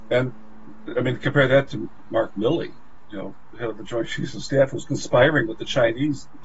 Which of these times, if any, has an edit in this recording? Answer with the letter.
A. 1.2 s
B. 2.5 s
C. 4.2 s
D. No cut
D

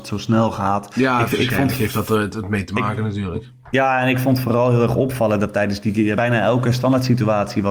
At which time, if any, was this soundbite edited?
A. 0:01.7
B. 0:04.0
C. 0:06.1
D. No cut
C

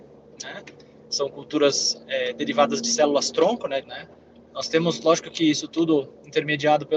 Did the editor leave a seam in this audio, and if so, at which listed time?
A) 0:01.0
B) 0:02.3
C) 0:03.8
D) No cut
C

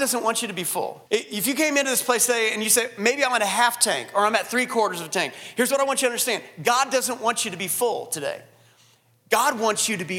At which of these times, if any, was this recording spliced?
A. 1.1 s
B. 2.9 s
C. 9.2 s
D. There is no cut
A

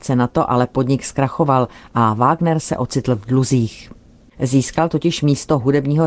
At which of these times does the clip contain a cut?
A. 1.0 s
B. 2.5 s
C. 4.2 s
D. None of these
C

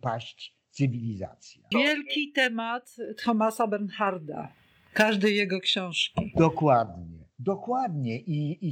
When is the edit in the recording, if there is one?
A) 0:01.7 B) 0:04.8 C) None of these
A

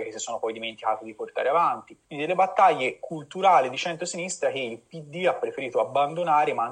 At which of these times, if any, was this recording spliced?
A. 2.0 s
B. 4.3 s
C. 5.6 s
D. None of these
A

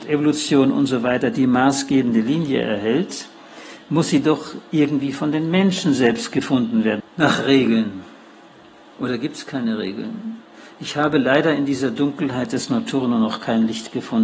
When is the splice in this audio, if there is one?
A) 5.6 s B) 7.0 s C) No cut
B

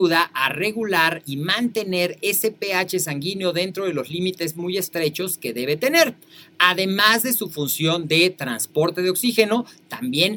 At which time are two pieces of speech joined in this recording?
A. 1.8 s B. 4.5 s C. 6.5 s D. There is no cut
D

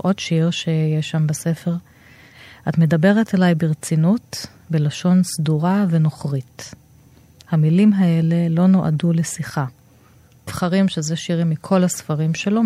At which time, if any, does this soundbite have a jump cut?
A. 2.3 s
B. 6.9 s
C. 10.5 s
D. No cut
C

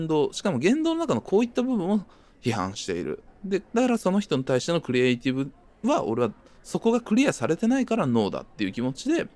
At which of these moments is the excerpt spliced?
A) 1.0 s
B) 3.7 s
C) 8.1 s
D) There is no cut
B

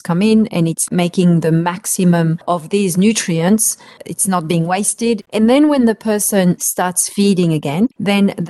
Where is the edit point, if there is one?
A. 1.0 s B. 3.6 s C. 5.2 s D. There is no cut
C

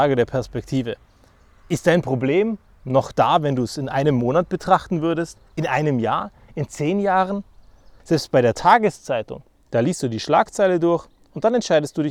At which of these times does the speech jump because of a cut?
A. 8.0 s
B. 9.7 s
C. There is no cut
A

